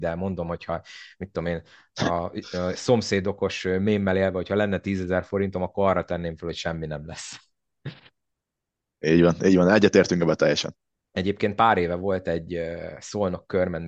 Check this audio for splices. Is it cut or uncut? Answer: uncut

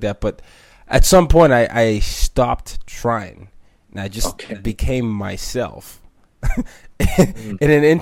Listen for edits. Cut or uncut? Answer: uncut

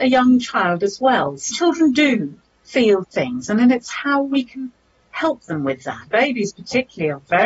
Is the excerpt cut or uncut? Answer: cut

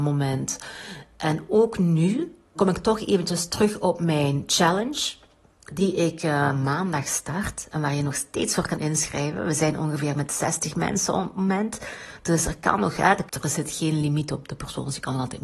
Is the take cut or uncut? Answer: cut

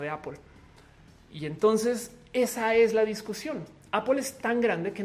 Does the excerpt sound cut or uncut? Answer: uncut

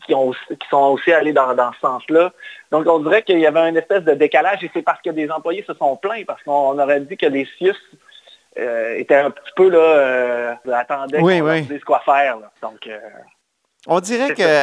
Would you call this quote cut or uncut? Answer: cut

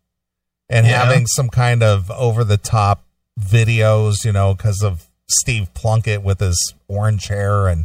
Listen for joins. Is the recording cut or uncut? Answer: uncut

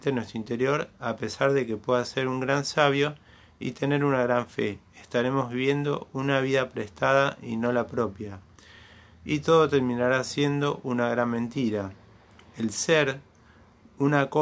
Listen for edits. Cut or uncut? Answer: uncut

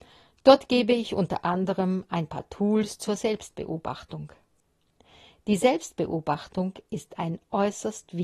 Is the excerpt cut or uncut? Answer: uncut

